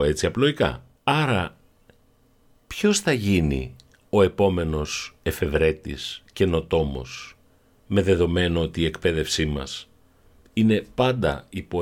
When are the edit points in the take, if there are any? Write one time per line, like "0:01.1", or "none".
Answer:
0:01.0